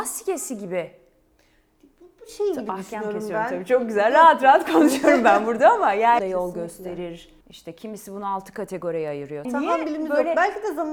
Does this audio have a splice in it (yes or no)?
yes